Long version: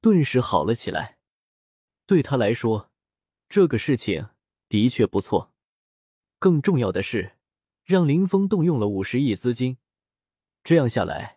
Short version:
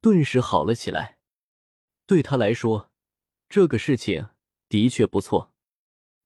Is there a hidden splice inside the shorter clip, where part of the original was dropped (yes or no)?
no